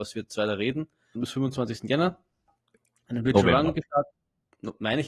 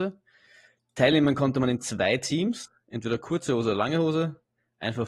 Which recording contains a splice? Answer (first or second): first